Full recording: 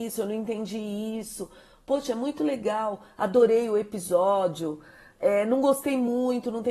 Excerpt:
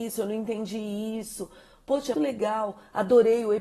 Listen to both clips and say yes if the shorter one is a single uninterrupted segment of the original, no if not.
no